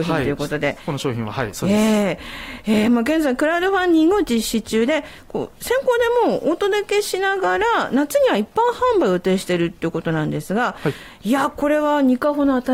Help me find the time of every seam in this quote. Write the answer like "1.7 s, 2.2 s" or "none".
none